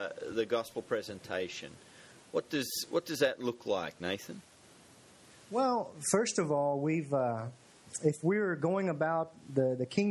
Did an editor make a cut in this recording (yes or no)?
no